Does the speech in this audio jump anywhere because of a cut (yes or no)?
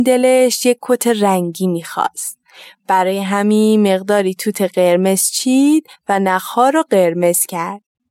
no